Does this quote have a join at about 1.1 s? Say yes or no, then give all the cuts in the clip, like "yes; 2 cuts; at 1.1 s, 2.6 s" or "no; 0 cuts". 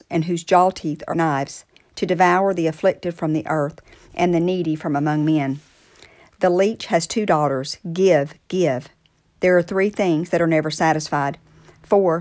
yes; 1 cut; at 1.1 s